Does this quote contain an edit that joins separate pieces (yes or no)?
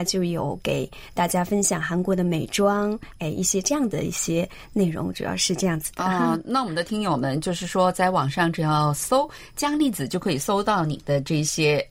no